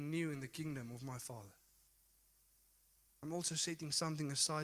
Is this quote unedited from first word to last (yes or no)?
yes